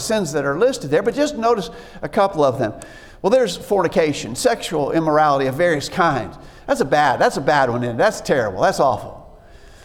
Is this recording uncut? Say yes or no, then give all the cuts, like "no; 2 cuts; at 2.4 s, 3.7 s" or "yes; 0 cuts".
yes; 0 cuts